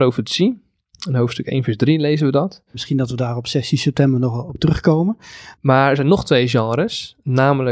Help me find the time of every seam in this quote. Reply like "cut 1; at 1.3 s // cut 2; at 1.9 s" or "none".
cut 1; at 2.7 s // cut 2; at 5.5 s